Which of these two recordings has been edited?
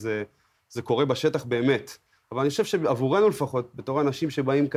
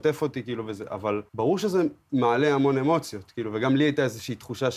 second; 1 cut; at 1.3 s

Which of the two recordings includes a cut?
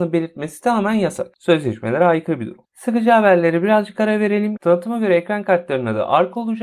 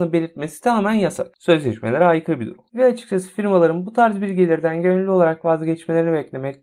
first; 2 cuts; at 2.6 s, 4.6 s

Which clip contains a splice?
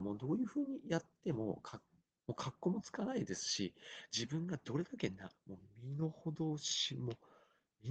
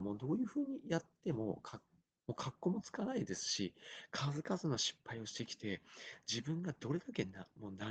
first; 2 cuts; at 4.1 s, 5.3 s

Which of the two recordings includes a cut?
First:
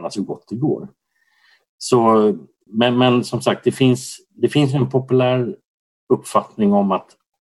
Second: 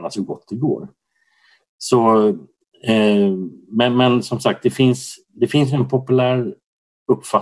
first; 1 cut; at 2.7 s

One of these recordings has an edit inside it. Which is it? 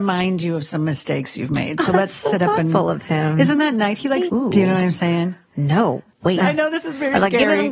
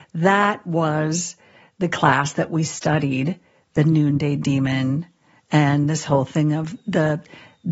first; 2 cuts; at 4.3 s, 6.4 s

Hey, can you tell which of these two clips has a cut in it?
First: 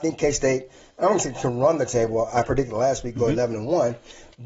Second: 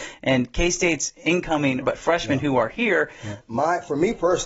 second; 2 cuts; at 1.8 s, 3.4 s

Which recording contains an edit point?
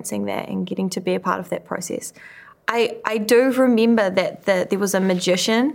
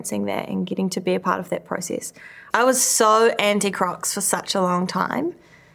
second; 1 cut; at 2.5 s

